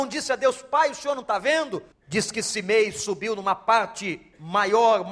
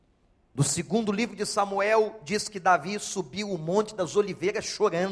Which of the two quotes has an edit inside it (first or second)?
first